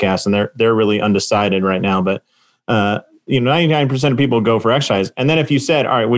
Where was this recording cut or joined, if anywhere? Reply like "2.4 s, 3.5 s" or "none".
none